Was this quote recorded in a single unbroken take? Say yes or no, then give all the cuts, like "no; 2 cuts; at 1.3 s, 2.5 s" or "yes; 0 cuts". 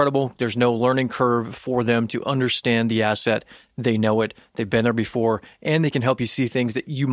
yes; 0 cuts